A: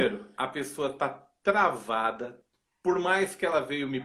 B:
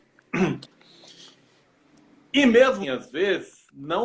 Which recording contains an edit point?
B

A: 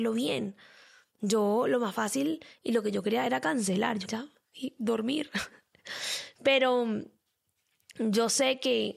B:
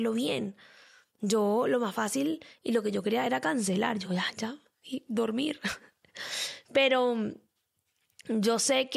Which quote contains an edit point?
A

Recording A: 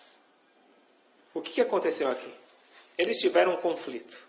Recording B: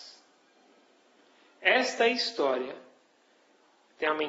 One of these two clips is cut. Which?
A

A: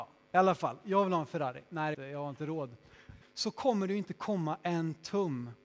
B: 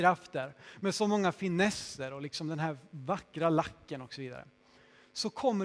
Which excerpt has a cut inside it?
A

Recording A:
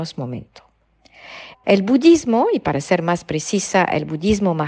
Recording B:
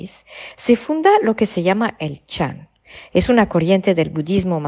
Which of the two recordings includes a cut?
A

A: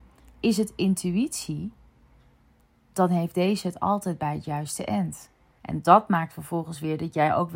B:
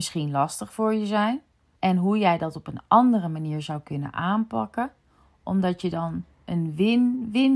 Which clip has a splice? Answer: A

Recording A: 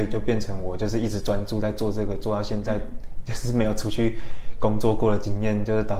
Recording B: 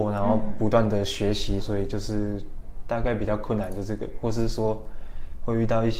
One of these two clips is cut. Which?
B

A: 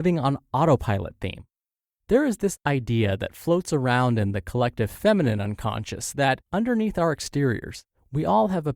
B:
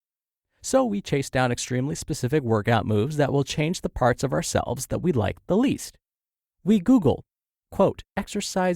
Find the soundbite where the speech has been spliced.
A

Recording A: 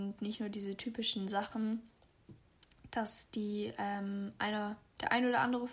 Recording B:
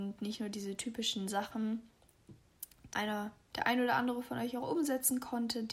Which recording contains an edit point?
B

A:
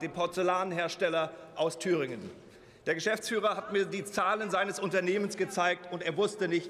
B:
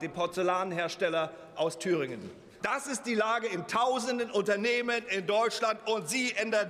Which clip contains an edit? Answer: B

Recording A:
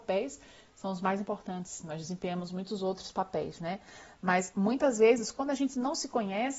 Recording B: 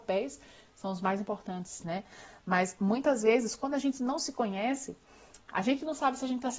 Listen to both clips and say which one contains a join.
B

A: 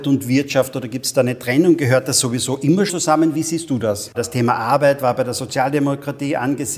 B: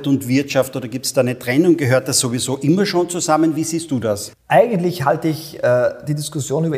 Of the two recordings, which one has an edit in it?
A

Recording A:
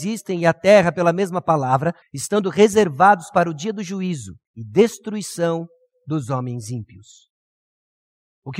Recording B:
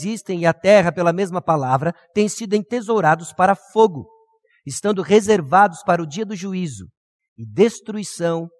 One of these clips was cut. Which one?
A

